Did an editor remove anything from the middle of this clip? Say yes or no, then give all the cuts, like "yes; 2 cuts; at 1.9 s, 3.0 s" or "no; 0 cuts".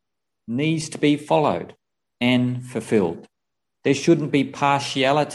yes; 1 cut; at 3.8 s